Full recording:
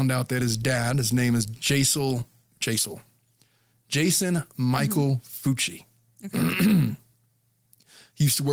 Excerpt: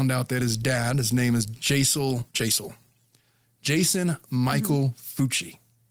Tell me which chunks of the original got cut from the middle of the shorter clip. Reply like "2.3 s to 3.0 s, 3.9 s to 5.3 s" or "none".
2.3 s to 2.6 s

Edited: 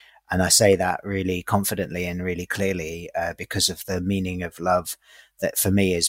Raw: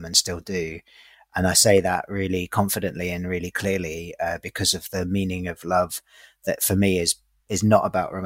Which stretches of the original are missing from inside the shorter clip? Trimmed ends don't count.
none

